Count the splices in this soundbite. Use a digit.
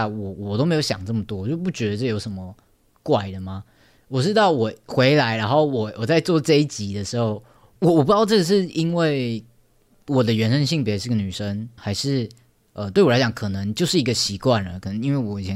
2